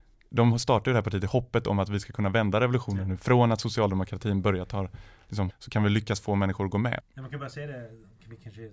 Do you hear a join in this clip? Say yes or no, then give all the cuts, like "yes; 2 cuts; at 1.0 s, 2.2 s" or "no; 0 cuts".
yes; 2 cuts; at 5.5 s, 7.0 s